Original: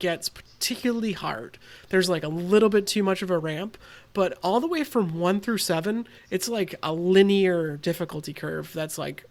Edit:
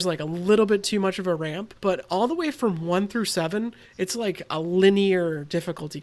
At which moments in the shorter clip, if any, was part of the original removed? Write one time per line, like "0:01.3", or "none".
0:01.8